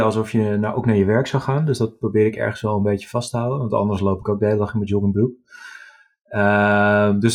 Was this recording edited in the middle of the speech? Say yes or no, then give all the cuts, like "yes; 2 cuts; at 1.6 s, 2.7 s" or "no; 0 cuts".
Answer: no; 0 cuts